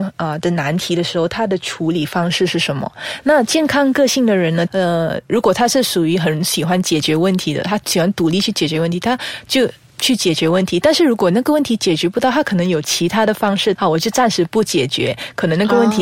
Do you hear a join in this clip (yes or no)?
yes